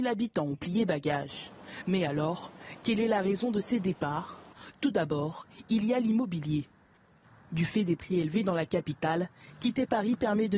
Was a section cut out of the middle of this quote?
no; 0 cuts

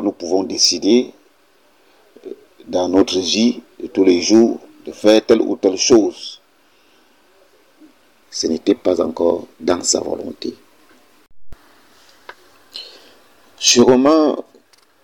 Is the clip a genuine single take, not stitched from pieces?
no; 1 cut; at 8.2 s

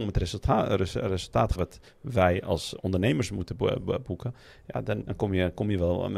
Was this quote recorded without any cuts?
no; 2 cuts; at 1.5 s, 5.0 s

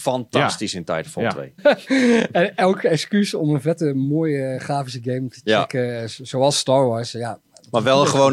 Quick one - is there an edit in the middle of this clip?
yes; 1 cut; at 1.6 s

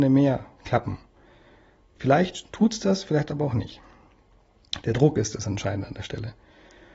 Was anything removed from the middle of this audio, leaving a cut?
no; 0 cuts

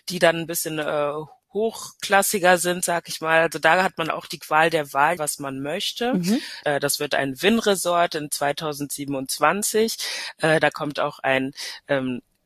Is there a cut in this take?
yes; 2 cuts; at 5.2 s, 6.6 s

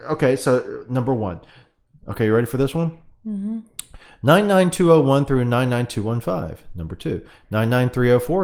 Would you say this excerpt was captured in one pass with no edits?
yes; 0 cuts

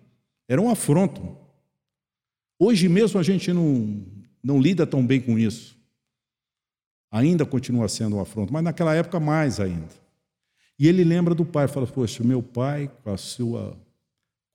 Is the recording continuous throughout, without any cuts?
yes; 0 cuts

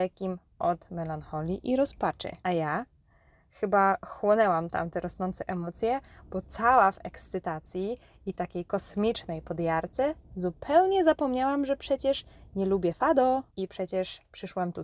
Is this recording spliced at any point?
yes; 2 cuts; at 2.4 s, 13.5 s

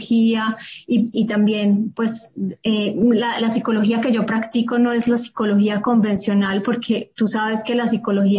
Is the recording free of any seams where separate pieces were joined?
no; 1 cut; at 1.1 s

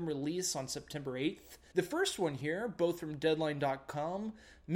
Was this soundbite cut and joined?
yes; 1 cut; at 1.7 s

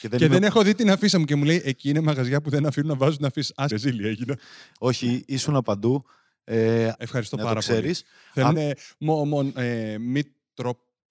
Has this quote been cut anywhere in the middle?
yes; 3 cuts; at 3.7 s, 7.0 s, 8.5 s

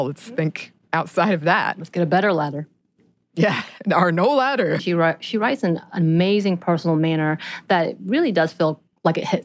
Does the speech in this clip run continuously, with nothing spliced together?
no; 1 cut; at 4.8 s

